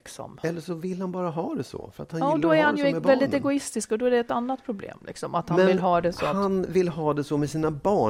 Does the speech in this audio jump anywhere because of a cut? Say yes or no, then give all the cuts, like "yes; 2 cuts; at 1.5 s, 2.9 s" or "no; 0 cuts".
no; 0 cuts